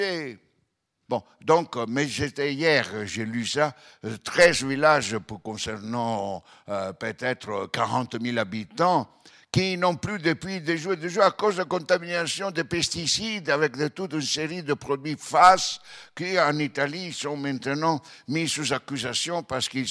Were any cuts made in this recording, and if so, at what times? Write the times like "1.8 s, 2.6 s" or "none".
1.1 s